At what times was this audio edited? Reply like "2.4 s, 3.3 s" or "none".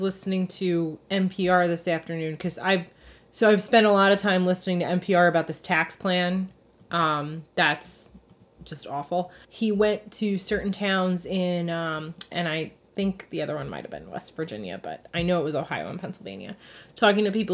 9.4 s, 12.3 s